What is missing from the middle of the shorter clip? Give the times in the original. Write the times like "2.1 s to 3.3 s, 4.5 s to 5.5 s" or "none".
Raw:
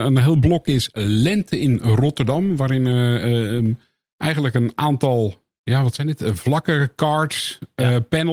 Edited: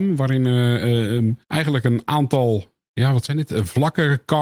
3.8 s to 4.1 s